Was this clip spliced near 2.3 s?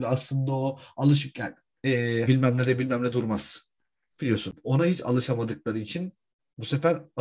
yes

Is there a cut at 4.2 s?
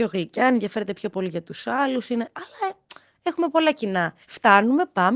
yes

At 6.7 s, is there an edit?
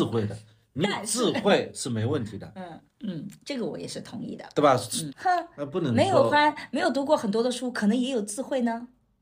no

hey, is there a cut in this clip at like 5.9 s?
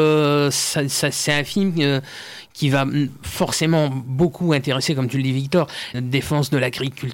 yes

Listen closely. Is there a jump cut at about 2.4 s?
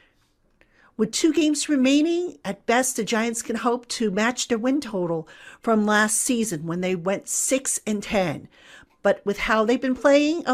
no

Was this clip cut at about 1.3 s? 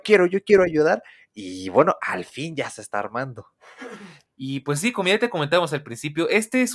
no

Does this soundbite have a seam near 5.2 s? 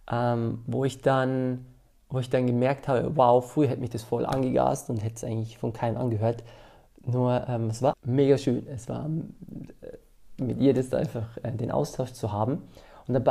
no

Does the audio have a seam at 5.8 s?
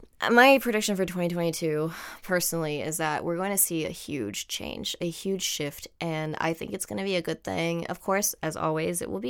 no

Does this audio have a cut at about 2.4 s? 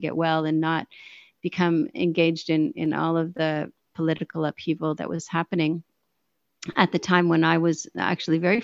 no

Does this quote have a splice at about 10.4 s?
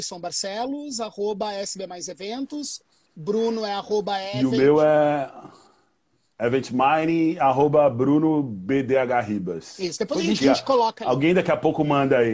yes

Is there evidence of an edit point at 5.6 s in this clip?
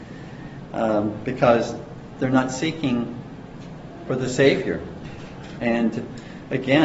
yes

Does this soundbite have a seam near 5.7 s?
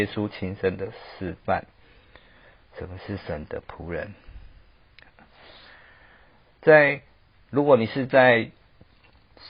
no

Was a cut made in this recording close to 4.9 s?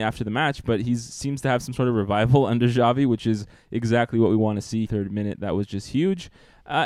yes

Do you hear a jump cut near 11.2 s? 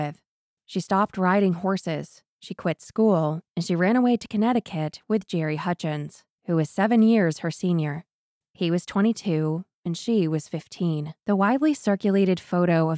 yes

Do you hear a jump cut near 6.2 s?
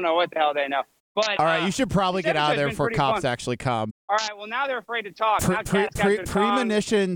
no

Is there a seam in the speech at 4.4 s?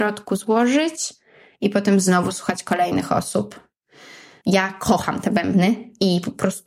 yes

